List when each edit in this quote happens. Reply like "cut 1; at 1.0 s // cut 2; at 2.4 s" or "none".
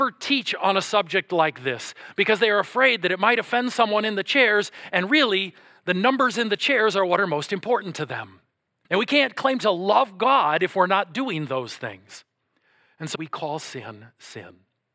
cut 1; at 8.8 s // cut 2; at 13.1 s